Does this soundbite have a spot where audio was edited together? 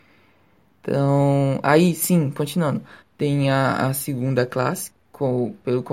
yes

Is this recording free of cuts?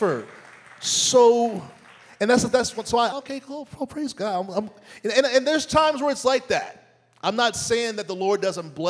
no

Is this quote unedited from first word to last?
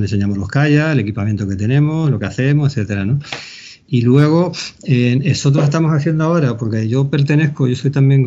yes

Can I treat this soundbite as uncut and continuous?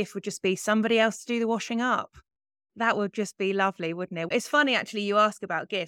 no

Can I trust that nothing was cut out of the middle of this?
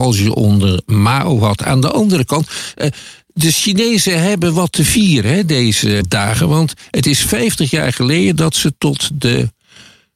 yes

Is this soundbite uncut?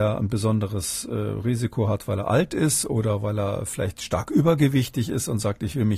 yes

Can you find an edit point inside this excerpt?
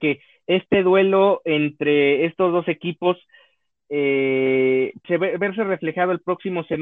yes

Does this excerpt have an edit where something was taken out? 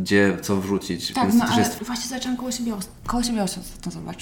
yes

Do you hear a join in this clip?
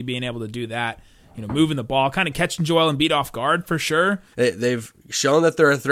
yes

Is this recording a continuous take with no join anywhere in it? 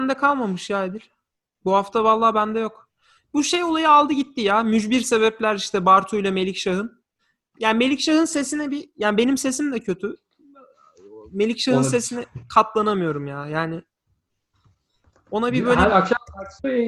yes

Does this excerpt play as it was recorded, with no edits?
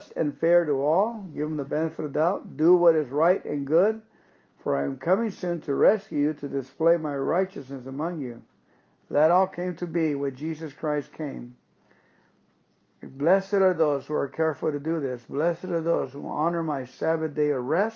yes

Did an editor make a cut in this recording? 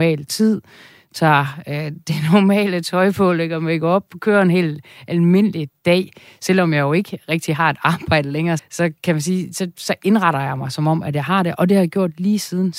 yes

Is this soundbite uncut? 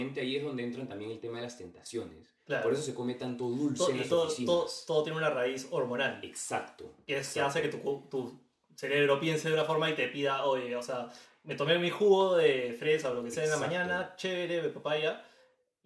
yes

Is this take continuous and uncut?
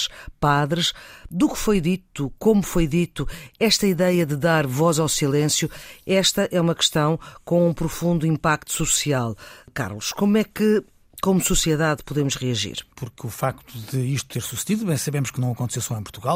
no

